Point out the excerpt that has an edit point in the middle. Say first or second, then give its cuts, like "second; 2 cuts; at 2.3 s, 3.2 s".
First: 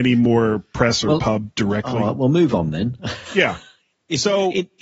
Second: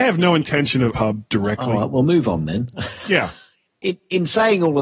second; 2 cuts; at 0.9 s, 3.8 s